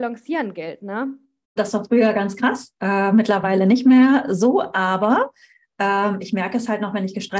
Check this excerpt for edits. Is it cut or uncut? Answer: cut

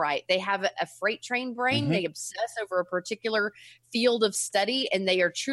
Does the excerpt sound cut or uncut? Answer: uncut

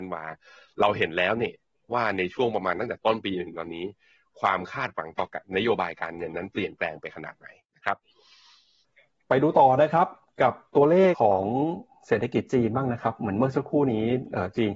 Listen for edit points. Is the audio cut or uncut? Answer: cut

